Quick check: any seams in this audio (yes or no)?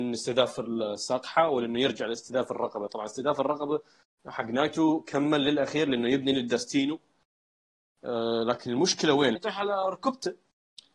yes